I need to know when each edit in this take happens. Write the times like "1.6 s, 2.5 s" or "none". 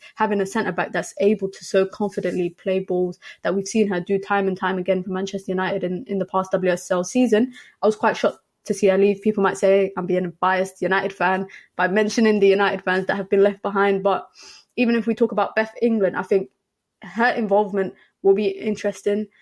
none